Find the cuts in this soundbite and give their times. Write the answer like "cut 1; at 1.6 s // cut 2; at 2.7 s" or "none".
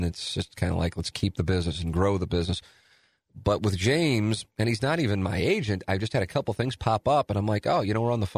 none

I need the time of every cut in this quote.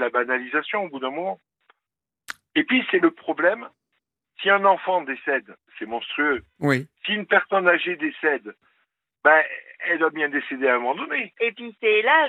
none

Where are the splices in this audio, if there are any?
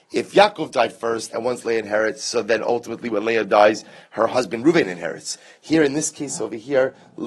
cut 1; at 1.3 s

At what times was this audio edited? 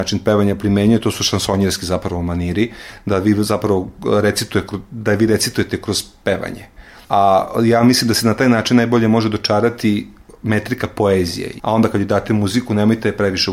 cut 1; at 7.0 s // cut 2; at 11.6 s

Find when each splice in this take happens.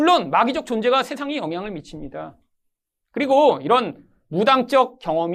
none

